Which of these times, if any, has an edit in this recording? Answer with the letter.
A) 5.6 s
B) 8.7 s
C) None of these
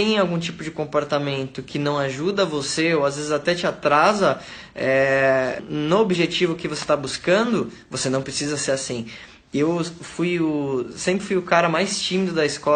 A